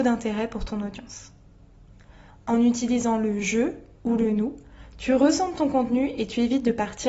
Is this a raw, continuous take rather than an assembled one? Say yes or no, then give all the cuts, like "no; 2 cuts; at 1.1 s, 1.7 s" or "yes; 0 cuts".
no; 1 cut; at 2.3 s